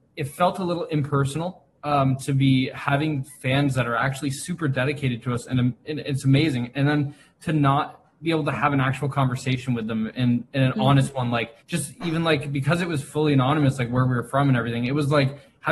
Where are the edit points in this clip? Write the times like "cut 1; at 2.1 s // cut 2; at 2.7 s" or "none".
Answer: cut 1; at 11.6 s

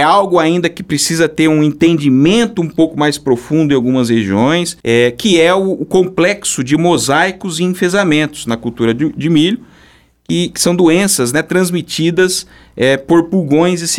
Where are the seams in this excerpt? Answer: cut 1; at 4.8 s

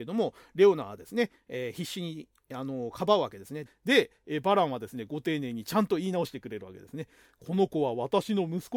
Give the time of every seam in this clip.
cut 1; at 3.7 s

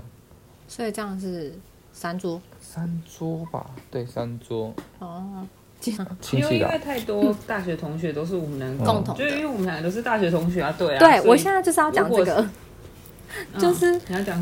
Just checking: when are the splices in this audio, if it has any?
cut 1; at 6.0 s

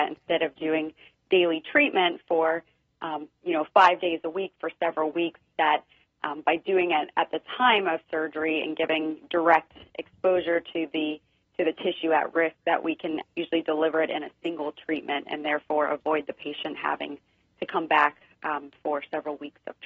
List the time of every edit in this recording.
cut 1; at 13.2 s

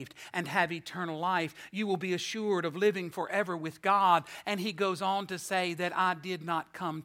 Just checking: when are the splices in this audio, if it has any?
none

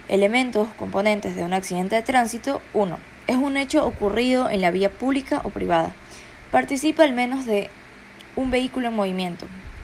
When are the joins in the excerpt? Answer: cut 1; at 6.5 s

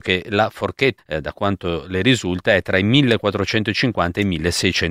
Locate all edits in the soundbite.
cut 1; at 1.0 s

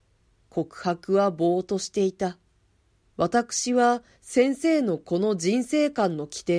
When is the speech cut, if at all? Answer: cut 1; at 3.1 s

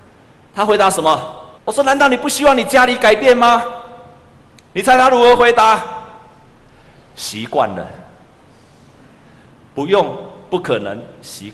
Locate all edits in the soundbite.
cut 1; at 1.6 s

